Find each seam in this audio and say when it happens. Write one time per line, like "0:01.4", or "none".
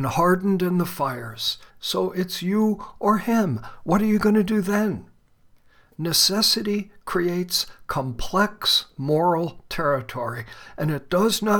0:01.7